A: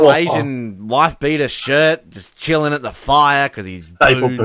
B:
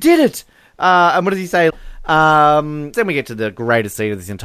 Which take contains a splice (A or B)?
B